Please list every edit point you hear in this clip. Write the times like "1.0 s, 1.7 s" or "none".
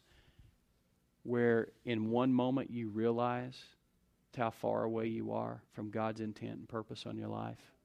4.3 s, 5.7 s